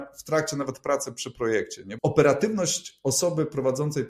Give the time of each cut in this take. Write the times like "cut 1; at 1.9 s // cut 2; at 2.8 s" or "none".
cut 1; at 2.0 s